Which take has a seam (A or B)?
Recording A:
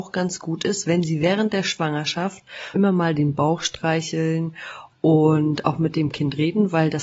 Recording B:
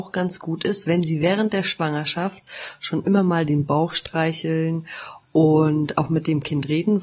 A